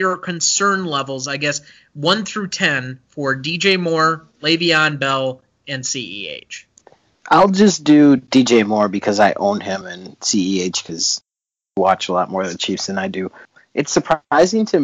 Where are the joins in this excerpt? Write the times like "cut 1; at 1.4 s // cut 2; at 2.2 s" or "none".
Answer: cut 1; at 9.8 s